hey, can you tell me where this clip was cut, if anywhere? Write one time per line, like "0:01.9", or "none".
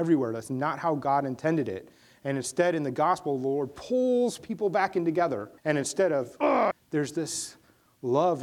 0:05.6
0:06.7